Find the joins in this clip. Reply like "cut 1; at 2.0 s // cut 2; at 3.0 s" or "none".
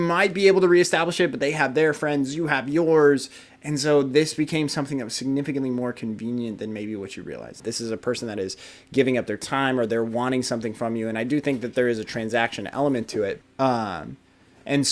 cut 1; at 7.6 s // cut 2; at 13.4 s